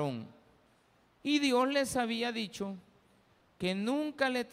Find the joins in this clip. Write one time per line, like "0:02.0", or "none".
0:01.2